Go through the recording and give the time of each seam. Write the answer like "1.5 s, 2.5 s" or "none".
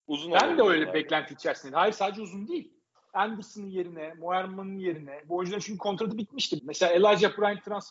6.6 s